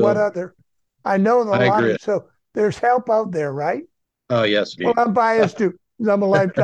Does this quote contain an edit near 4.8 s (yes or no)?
yes